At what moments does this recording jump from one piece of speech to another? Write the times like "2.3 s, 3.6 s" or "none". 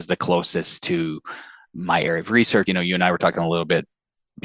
2.7 s